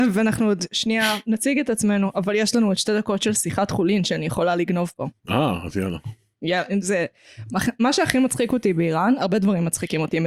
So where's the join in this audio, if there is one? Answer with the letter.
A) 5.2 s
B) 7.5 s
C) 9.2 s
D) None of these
D